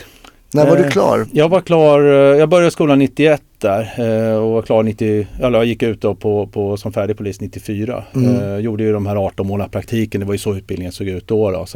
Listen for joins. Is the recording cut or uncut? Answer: uncut